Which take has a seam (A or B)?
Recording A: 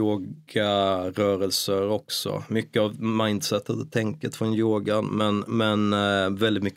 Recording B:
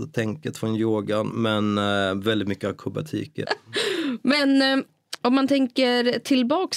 B